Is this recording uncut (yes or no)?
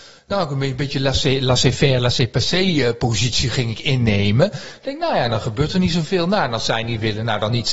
yes